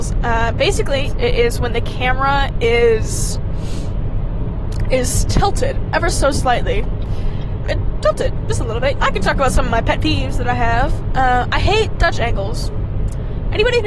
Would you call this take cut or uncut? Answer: cut